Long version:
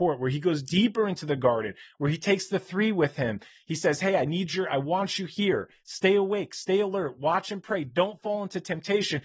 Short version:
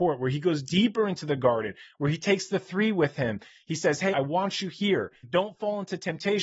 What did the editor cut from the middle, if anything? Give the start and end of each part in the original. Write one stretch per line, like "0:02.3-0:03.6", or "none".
0:04.1-0:04.7
0:05.8-0:07.9